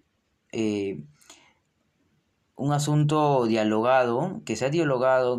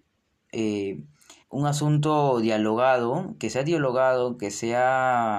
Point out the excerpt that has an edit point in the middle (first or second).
second